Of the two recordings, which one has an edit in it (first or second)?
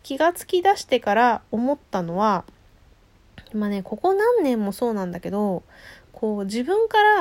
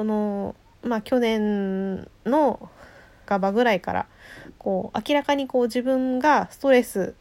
second